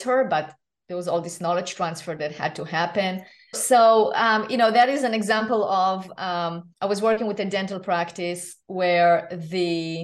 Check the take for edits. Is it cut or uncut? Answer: cut